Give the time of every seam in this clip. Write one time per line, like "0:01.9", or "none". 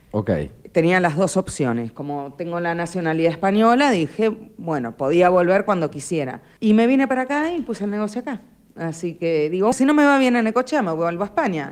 0:06.6
0:09.7